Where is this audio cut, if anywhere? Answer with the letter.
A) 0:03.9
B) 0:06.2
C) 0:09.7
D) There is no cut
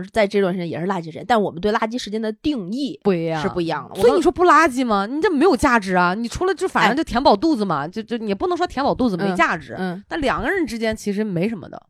A